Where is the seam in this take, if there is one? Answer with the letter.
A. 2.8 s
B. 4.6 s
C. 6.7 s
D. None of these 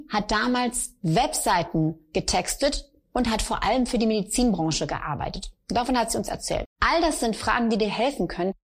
C